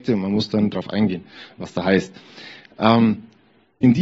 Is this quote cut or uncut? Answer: uncut